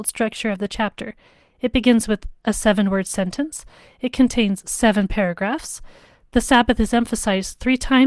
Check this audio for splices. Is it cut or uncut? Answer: uncut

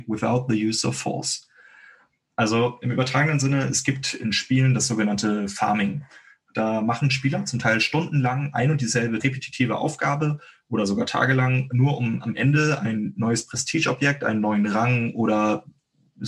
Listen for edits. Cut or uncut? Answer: uncut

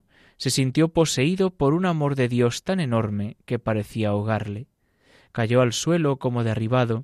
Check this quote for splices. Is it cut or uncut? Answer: uncut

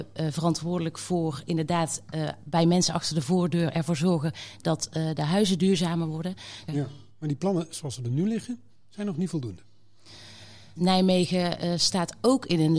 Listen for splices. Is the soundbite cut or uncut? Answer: cut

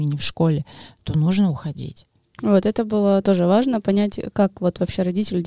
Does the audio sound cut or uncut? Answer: cut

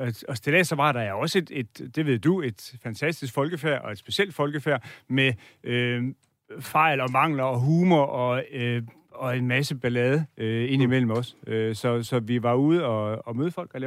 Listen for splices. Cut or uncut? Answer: uncut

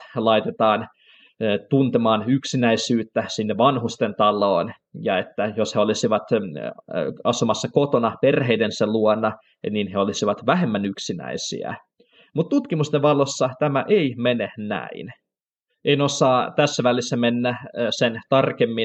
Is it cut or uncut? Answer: uncut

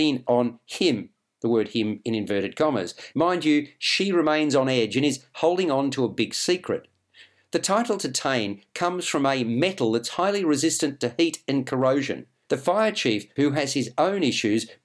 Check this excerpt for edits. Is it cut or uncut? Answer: cut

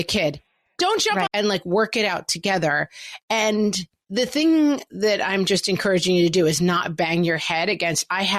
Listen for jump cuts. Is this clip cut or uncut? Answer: cut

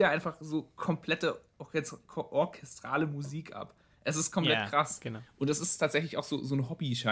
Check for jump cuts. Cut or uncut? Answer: uncut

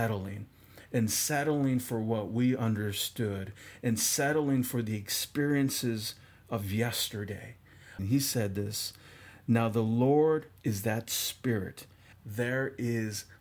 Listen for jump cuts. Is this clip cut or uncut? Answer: cut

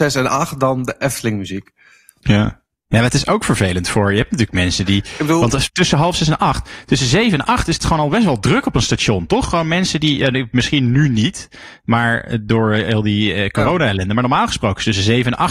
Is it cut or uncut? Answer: uncut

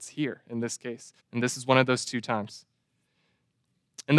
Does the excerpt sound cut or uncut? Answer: cut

